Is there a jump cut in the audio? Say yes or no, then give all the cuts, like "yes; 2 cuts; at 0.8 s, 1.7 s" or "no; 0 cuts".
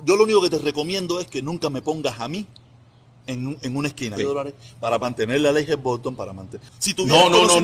yes; 2 cuts; at 4.2 s, 6.7 s